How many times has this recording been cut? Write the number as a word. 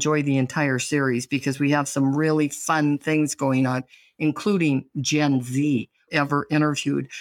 one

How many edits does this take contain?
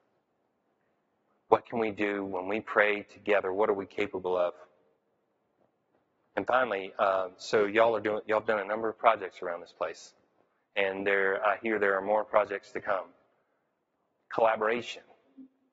zero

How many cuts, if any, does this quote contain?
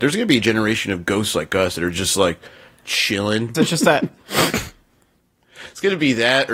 one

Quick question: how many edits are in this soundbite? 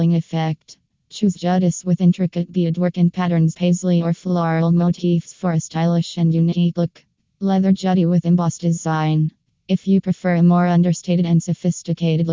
one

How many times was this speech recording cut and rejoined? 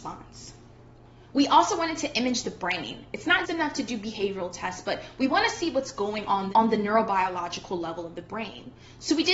one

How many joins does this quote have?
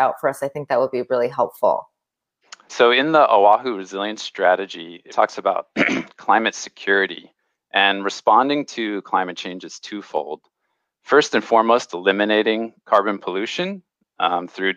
two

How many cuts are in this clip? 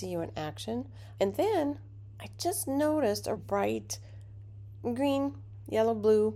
two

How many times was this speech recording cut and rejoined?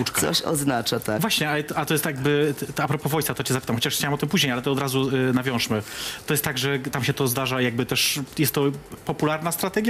one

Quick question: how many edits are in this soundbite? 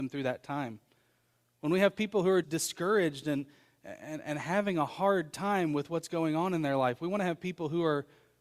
one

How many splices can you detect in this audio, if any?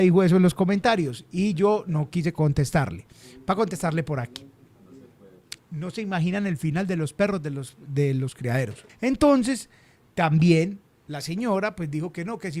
two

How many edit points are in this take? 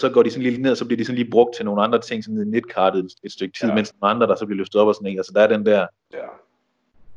two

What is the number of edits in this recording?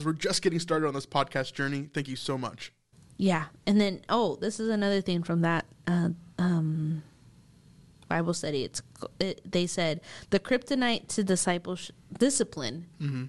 zero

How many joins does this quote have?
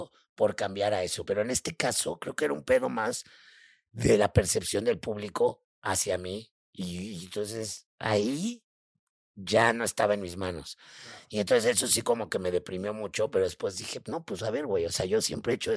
zero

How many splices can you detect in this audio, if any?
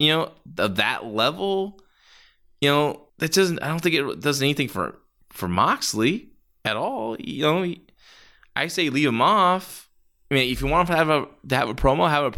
one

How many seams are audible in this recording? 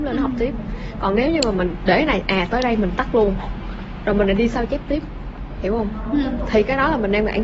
zero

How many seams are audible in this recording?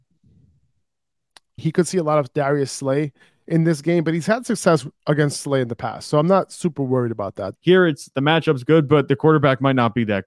two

